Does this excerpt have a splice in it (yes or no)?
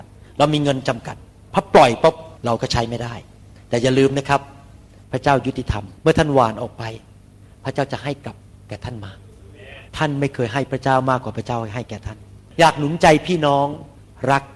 yes